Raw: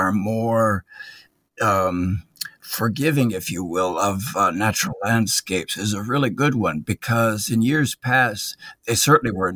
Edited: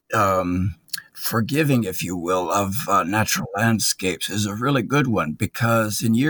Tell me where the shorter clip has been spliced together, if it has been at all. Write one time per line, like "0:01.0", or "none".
none